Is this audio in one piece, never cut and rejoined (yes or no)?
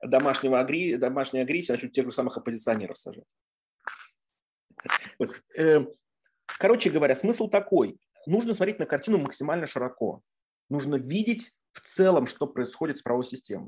yes